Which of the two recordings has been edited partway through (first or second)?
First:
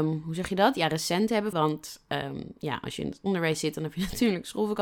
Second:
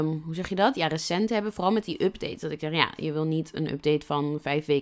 first